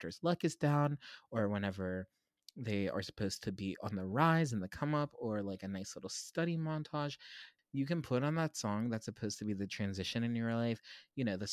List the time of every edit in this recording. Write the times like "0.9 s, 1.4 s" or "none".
7.6 s

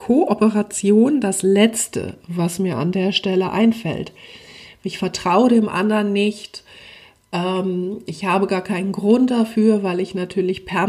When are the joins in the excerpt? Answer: none

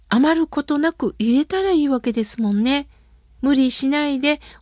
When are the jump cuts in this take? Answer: 3.4 s

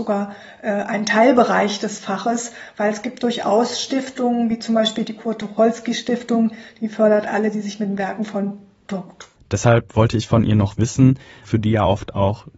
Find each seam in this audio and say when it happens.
9.4 s, 11.4 s

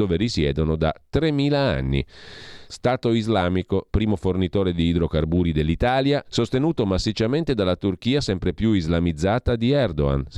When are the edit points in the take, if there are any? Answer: 2.7 s, 3.9 s, 6.2 s

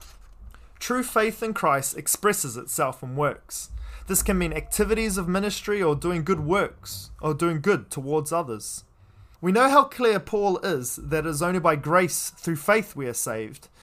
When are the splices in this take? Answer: 9.3 s

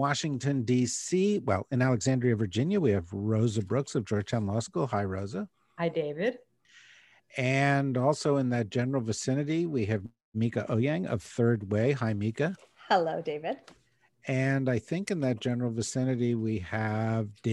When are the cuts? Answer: none

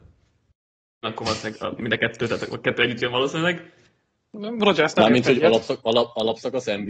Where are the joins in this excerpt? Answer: 1.0 s

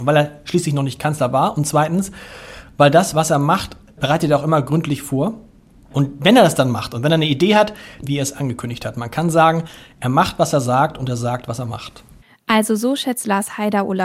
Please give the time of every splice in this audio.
8.0 s

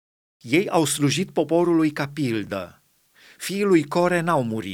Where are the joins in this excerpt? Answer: none

